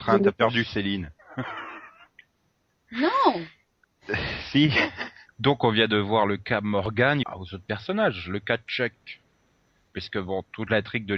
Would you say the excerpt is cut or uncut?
cut